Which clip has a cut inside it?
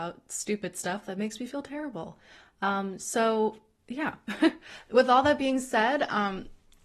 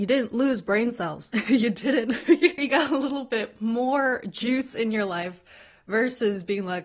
second; 1 cut; at 2.6 s

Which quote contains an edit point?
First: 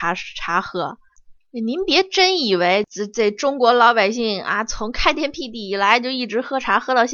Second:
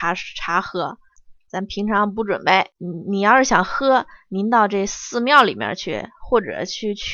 second; 2 cuts; at 1.5 s, 2.7 s

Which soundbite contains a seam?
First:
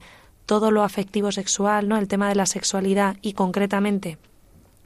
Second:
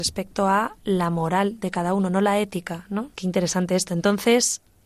second; 1 cut; at 3.1 s

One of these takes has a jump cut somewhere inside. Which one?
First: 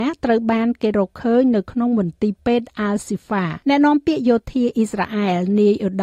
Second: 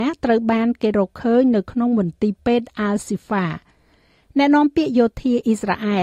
first; 1 cut; at 3.6 s

